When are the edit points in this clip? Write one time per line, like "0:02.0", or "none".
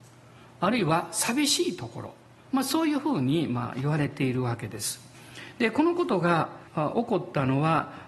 0:06.7